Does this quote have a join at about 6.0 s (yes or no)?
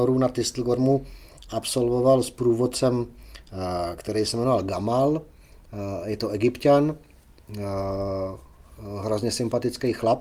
no